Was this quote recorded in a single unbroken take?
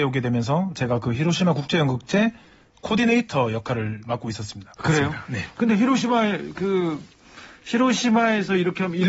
no; 1 cut; at 4.8 s

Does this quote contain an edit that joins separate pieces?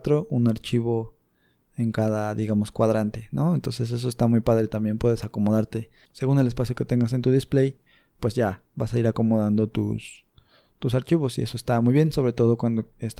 no; 0 cuts

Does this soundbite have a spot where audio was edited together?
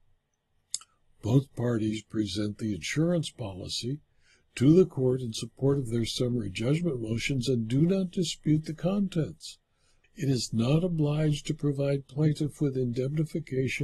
yes; 1 cut; at 10.0 s

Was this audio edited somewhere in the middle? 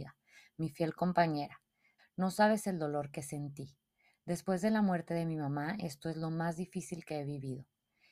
yes; 1 cut; at 2.0 s

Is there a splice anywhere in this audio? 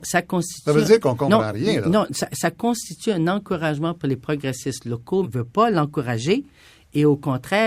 yes; 1 cut; at 5.2 s

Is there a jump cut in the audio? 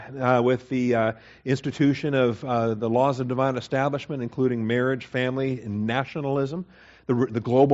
no; 0 cuts

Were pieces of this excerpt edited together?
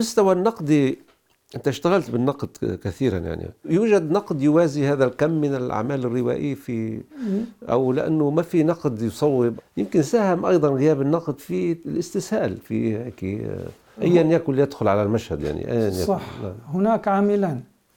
no; 0 cuts

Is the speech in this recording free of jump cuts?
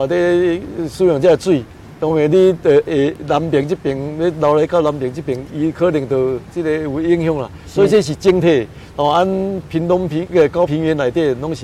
no; 2 cuts; at 8.9 s, 10.7 s

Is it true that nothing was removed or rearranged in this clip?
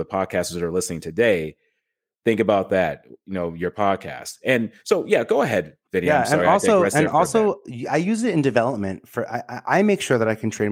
yes; 0 cuts

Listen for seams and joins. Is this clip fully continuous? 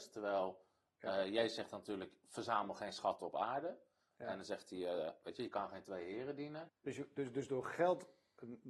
no; 1 cut; at 6.7 s

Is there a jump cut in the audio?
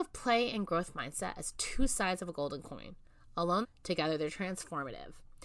yes; 1 cut; at 3.6 s

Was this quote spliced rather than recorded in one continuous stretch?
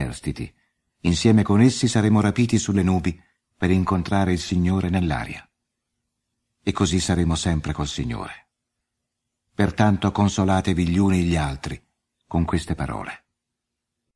no; 0 cuts

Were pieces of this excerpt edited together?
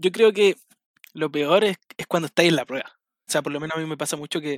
yes; 1 cut; at 3.3 s

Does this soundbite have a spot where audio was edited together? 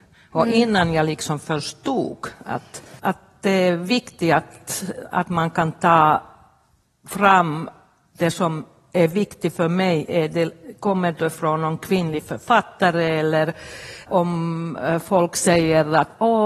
yes; 2 cuts; at 3.0 s, 14.1 s

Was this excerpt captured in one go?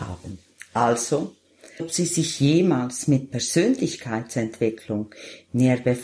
no; 1 cut; at 1.8 s

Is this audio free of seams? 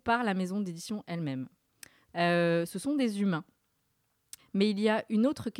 no; 2 cuts; at 2.1 s, 4.4 s

